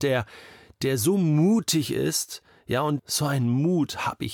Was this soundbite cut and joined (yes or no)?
yes